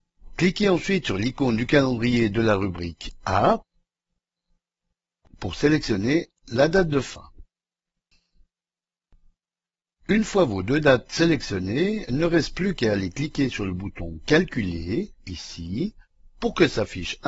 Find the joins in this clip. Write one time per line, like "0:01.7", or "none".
none